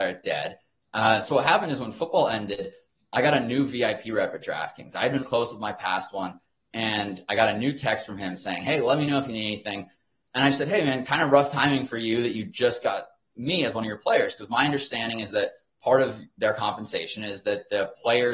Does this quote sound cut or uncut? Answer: cut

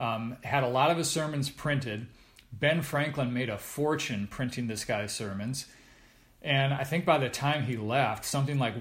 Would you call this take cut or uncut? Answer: uncut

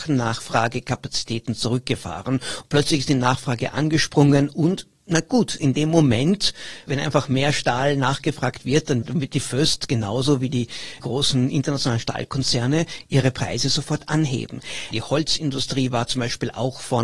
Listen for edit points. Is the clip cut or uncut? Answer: cut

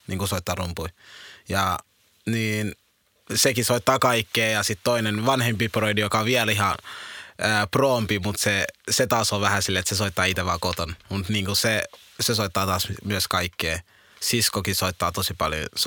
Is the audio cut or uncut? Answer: uncut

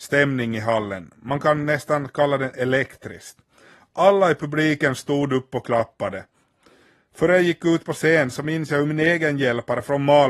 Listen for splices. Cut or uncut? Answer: uncut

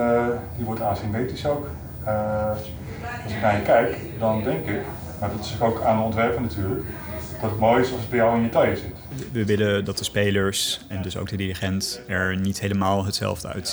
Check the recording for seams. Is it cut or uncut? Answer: uncut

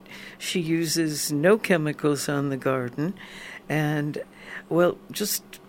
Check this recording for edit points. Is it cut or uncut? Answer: uncut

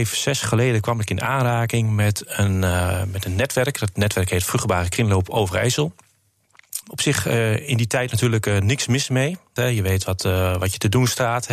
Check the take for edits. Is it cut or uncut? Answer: cut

